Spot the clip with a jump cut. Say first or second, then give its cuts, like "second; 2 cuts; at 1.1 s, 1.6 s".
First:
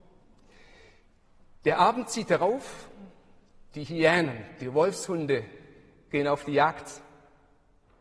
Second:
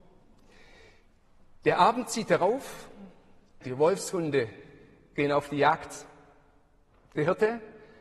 second; 1 cut; at 3.6 s